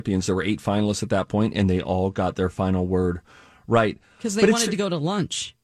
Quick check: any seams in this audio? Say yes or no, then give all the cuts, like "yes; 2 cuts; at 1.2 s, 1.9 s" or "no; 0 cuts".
no; 0 cuts